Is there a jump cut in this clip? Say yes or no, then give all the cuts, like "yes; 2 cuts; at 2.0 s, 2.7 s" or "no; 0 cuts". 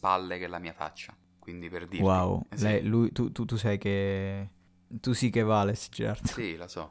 no; 0 cuts